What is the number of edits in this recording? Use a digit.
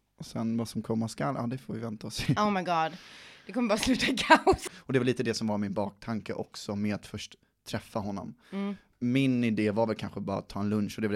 1